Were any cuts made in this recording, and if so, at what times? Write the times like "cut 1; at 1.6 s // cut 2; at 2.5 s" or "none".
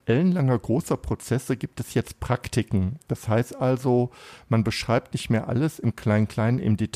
none